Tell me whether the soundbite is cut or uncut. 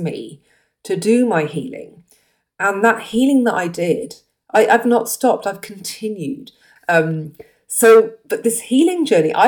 cut